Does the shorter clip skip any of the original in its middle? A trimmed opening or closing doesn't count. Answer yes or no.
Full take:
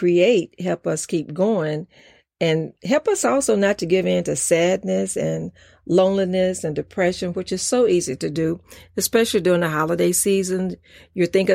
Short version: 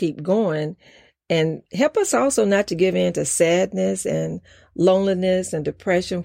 no